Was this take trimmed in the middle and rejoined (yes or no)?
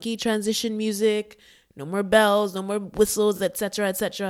no